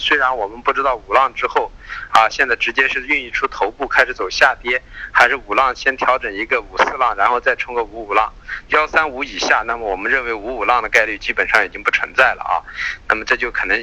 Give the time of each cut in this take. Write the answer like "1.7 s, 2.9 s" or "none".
8.7 s